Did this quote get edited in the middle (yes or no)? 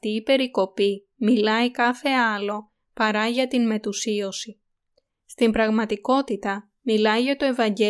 no